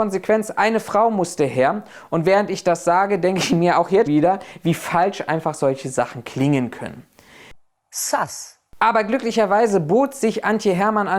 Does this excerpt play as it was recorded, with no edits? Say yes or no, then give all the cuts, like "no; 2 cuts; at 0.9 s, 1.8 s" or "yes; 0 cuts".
no; 1 cut; at 4.1 s